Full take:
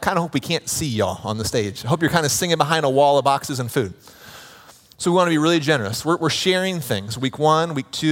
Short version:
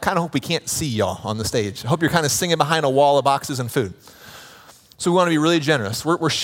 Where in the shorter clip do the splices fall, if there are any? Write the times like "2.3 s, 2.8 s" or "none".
none